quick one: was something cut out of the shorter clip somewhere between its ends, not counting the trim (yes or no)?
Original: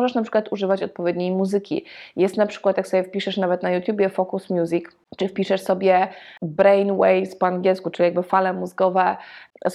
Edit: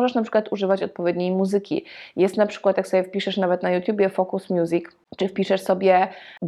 no